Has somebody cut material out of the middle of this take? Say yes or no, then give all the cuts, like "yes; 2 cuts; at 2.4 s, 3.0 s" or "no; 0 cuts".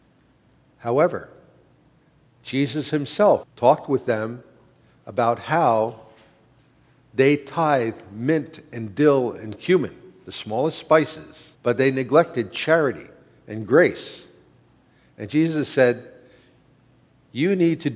yes; 2 cuts; at 3.4 s, 11.5 s